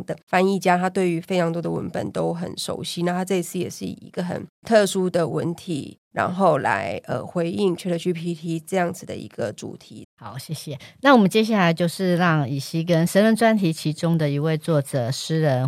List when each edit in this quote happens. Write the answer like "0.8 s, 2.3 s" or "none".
10.0 s